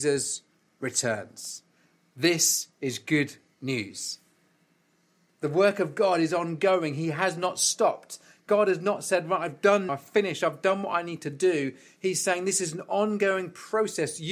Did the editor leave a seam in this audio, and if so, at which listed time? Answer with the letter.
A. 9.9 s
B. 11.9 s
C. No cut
A